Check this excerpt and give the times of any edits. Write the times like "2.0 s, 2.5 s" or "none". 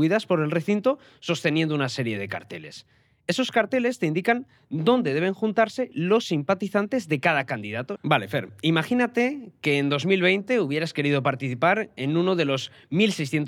8.0 s